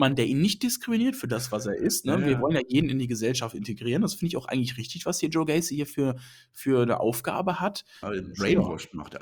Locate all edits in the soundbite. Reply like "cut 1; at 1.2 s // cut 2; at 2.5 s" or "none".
cut 1; at 8.0 s